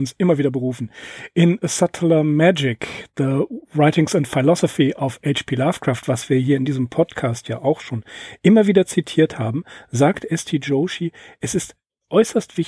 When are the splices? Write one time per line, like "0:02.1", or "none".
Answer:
none